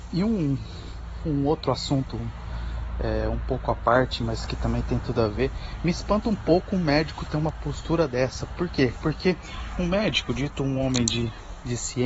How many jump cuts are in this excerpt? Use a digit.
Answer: 0